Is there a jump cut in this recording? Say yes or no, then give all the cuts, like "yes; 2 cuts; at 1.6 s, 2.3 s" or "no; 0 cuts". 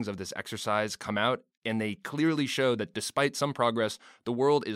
no; 0 cuts